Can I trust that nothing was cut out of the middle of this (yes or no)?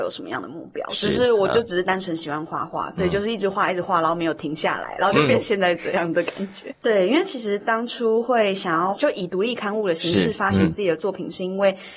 no